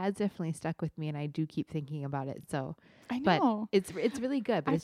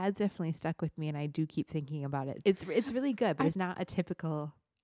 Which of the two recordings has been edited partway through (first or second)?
second